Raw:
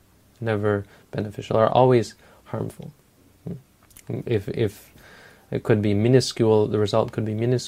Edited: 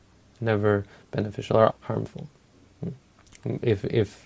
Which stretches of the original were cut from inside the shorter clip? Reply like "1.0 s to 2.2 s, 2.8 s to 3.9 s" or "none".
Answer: 1.7 s to 2.3 s